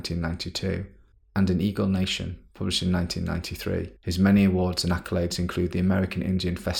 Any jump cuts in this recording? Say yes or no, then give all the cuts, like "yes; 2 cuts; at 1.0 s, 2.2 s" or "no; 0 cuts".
yes; 1 cut; at 4.0 s